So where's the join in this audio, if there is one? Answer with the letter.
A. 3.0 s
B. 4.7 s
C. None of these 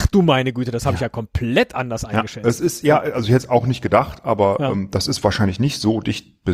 C